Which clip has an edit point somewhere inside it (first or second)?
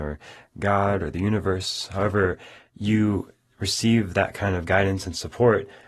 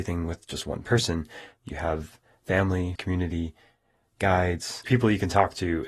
second